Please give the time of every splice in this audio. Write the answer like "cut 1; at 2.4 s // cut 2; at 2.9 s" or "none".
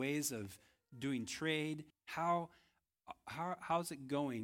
cut 1; at 1.9 s